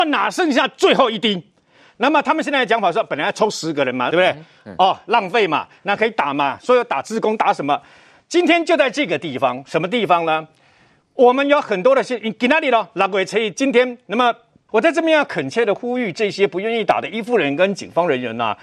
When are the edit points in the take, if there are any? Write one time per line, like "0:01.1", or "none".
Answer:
0:04.1
0:14.7